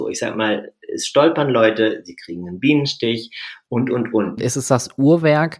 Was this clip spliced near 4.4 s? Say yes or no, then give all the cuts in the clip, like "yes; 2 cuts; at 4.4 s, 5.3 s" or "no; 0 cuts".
yes; 1 cut; at 4.4 s